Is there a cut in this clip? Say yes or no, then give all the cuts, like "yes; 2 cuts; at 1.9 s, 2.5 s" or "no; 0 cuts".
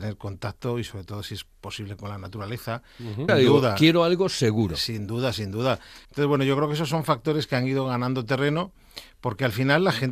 yes; 2 cuts; at 3.3 s, 6.0 s